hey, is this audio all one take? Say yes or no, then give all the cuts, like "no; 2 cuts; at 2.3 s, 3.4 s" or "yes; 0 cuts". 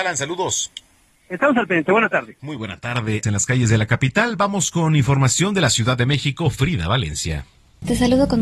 no; 1 cut; at 3.2 s